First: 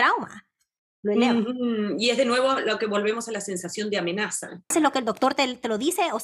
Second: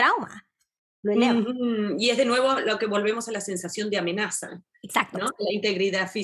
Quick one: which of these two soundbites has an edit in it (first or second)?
first